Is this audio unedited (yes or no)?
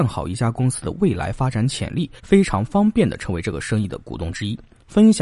no